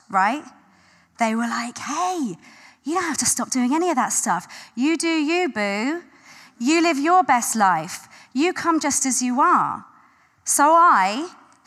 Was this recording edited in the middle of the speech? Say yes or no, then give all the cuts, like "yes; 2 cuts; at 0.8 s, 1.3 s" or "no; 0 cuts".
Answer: no; 0 cuts